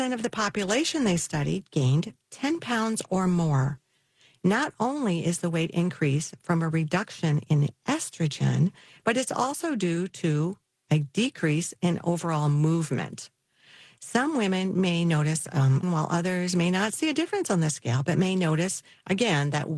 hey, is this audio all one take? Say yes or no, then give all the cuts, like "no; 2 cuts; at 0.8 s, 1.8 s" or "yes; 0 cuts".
no; 1 cut; at 15.8 s